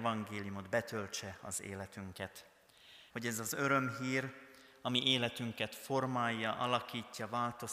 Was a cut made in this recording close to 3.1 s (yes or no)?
yes